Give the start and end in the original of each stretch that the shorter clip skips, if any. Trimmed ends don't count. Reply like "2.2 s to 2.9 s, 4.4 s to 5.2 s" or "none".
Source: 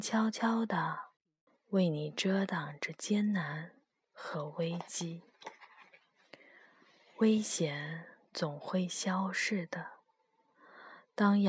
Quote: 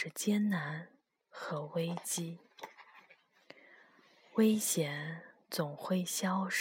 none